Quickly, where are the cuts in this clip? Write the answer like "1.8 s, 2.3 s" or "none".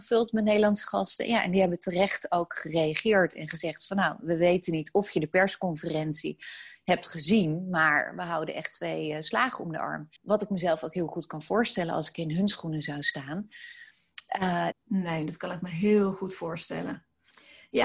10.2 s, 14.7 s